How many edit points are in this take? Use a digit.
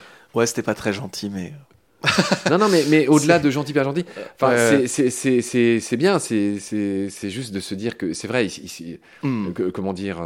0